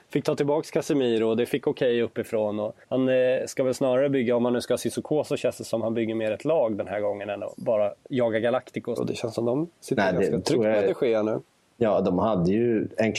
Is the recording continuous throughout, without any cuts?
no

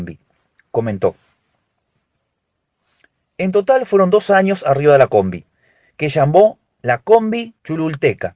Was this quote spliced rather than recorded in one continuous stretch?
no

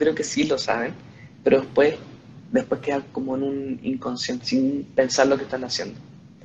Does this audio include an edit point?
yes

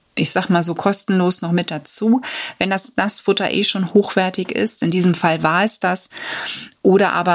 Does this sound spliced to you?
no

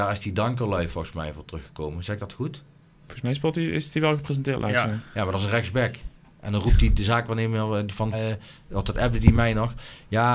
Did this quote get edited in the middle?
yes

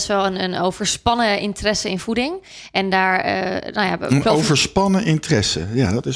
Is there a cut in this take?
no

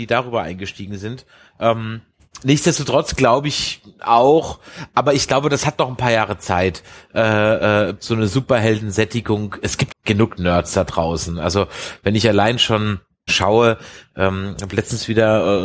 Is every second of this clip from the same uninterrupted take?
no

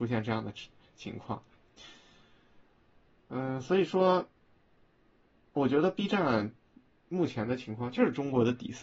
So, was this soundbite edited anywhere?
no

